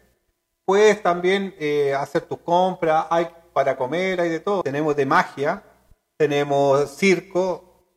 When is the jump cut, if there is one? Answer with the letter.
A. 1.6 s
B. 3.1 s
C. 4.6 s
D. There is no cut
C